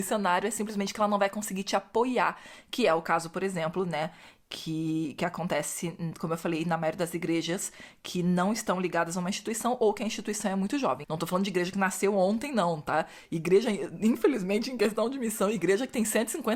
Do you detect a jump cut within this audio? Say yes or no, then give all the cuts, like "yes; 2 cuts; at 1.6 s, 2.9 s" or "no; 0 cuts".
yes; 1 cut; at 11.0 s